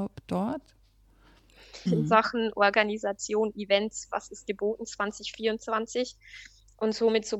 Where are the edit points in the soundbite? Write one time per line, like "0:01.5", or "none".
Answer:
0:01.9